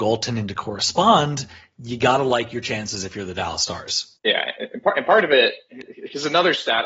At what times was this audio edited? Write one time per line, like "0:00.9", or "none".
none